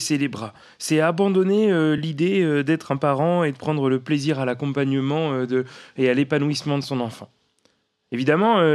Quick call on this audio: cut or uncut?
uncut